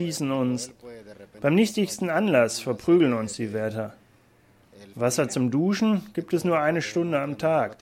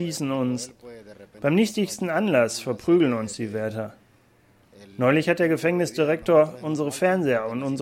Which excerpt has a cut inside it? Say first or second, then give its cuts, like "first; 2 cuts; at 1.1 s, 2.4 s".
first; 1 cut; at 4.9 s